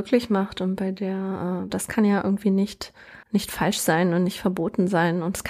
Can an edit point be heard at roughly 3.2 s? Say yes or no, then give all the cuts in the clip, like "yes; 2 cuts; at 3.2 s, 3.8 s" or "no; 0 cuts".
yes; 2 cuts; at 1.7 s, 3.2 s